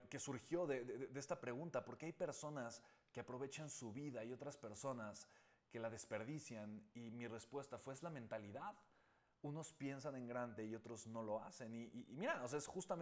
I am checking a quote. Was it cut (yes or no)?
no